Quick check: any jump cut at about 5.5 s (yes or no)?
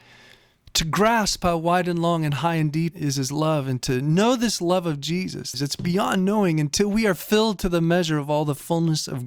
yes